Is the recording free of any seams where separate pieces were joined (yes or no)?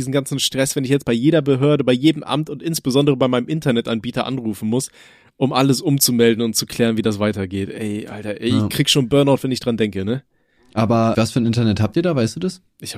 no